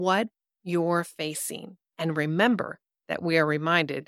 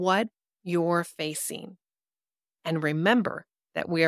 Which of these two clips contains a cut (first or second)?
first